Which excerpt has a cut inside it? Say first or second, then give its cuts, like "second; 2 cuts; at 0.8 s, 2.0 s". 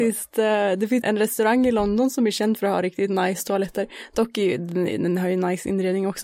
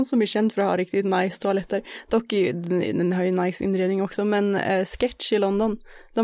first; 1 cut; at 1.0 s